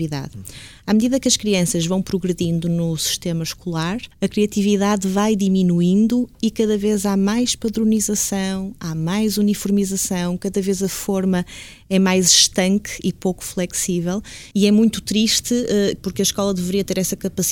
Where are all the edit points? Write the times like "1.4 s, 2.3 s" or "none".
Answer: 4.1 s, 14.5 s, 16.0 s